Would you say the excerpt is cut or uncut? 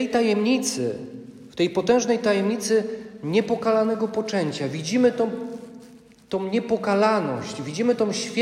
uncut